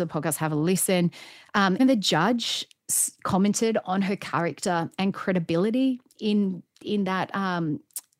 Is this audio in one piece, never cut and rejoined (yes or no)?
no